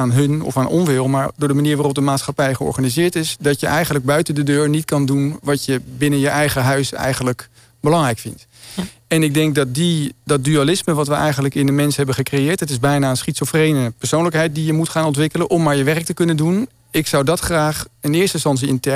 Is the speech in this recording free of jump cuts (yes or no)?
yes